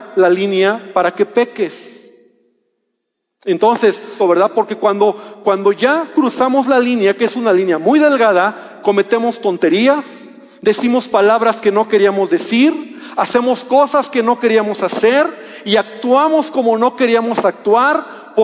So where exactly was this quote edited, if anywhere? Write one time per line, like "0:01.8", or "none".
0:04.2